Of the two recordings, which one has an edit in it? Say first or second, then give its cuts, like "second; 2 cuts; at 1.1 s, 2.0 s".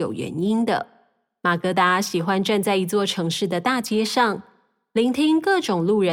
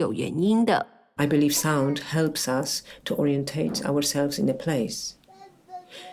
second; 1 cut; at 1.2 s